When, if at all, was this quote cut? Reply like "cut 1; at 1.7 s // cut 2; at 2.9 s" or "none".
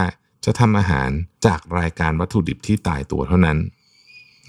cut 1; at 1.3 s

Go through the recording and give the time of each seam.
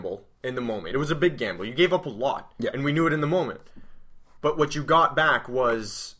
none

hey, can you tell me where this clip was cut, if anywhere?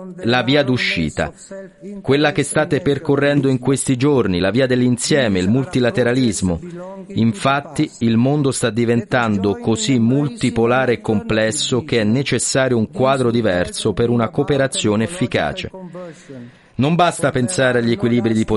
none

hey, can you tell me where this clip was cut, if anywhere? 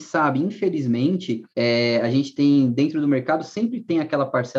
cut 1; at 1.5 s

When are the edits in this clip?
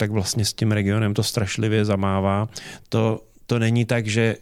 cut 1; at 2.8 s

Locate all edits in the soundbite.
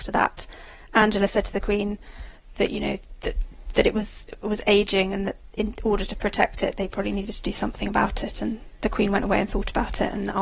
none

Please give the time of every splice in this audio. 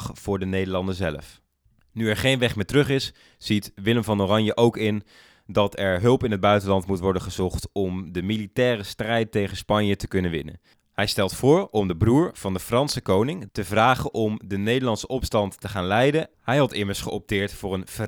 cut 1; at 13.5 s // cut 2; at 16.3 s

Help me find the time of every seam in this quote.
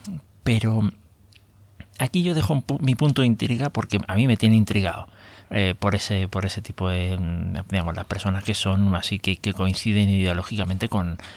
cut 1; at 5.4 s // cut 2; at 9.2 s

